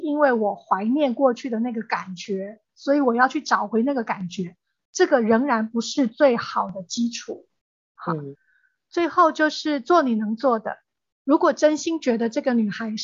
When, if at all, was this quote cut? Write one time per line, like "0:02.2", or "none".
none